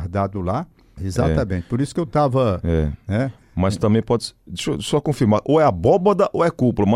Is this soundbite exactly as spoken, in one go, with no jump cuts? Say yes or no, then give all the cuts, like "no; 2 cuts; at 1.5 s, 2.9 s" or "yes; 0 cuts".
no; 1 cut; at 1.0 s